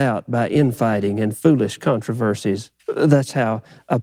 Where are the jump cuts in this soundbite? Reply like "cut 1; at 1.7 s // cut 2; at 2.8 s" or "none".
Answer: cut 1; at 2.8 s